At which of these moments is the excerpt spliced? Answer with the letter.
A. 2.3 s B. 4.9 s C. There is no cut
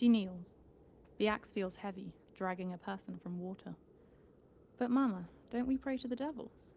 A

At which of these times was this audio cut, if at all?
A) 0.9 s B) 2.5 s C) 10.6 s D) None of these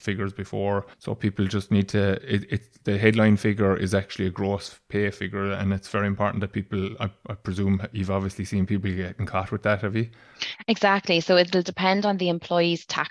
A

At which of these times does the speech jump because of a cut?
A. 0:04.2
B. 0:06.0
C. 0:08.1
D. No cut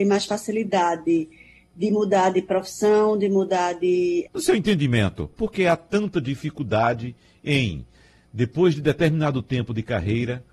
A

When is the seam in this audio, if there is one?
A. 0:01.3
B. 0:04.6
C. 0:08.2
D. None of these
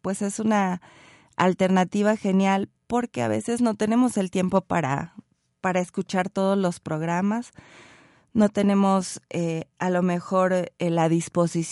D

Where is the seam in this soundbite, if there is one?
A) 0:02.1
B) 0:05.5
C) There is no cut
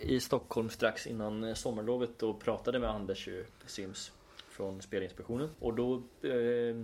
B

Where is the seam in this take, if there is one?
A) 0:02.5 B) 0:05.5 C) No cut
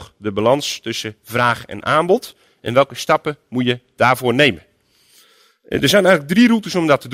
C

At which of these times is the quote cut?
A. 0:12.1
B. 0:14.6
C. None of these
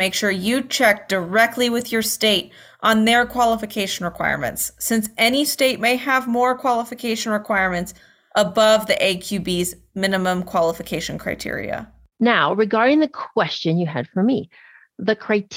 A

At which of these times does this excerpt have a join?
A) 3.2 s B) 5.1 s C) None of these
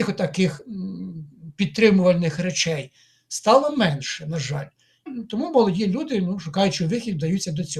B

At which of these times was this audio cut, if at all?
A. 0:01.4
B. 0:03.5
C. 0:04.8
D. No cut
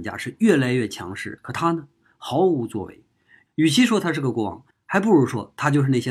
A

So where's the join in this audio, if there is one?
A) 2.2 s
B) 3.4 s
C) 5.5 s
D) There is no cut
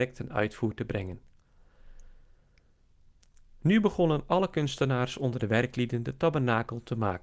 D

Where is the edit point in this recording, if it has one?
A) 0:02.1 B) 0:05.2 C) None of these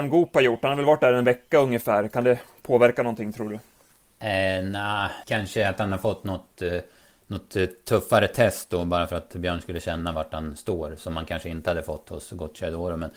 B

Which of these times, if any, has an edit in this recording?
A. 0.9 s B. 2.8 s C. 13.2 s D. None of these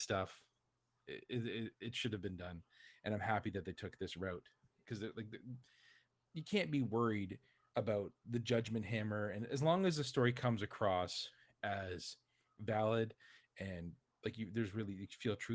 D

